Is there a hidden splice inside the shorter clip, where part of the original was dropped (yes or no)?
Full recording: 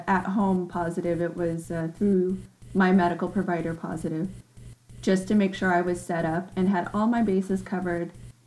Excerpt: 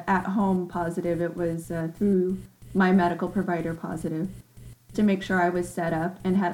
yes